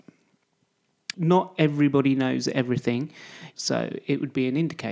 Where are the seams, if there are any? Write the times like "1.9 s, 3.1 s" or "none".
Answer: 1.1 s, 3.5 s